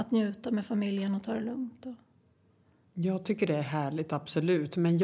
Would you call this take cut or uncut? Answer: uncut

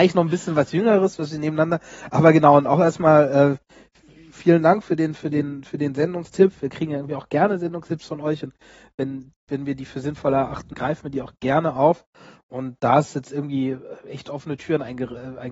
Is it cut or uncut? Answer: cut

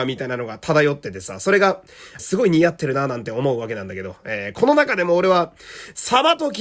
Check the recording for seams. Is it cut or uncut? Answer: cut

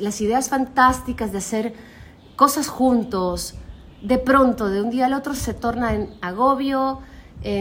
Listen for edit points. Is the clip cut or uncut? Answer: uncut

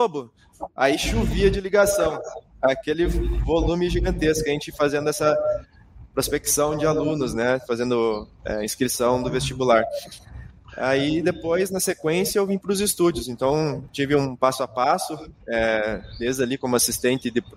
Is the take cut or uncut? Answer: uncut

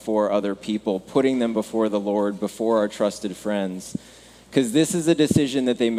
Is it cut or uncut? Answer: uncut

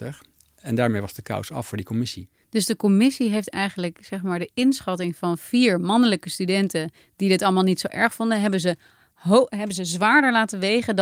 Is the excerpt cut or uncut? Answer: uncut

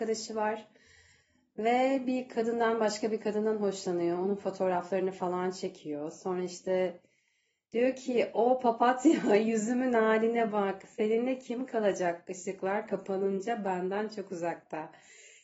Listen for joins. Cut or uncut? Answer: uncut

